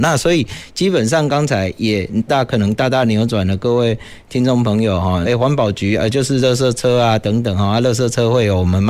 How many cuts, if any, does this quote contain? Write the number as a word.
two